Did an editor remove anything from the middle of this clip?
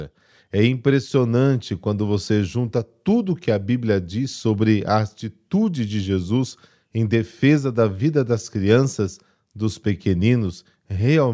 no; 0 cuts

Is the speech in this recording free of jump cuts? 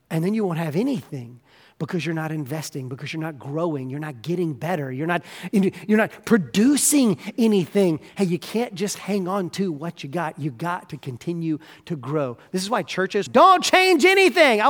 no; 1 cut; at 13.3 s

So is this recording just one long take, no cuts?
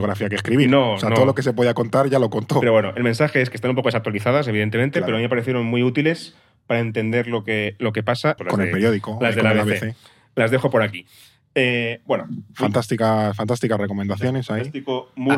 no; 1 cut; at 8.4 s

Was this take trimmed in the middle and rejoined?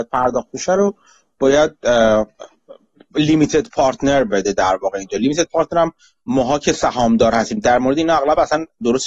no; 0 cuts

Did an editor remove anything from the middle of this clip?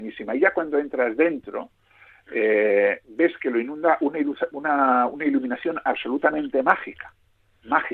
no; 0 cuts

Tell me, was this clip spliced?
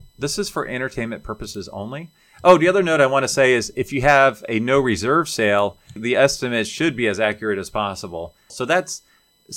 yes; 2 cuts; at 6.0 s, 8.5 s

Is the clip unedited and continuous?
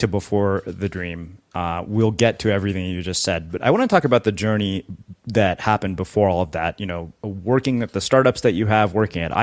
yes; 0 cuts

